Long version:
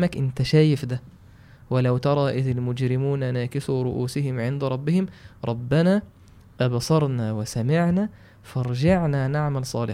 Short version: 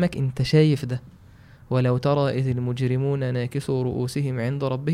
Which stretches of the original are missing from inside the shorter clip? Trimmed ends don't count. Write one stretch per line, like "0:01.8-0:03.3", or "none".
none